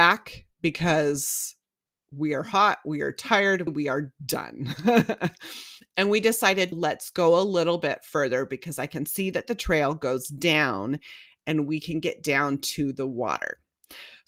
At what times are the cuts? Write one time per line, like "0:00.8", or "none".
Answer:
0:03.7
0:06.7